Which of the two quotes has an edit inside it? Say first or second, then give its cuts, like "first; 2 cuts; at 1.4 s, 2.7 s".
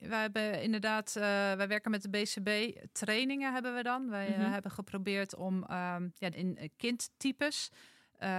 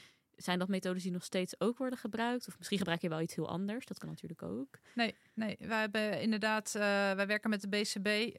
first; 1 cut; at 6.3 s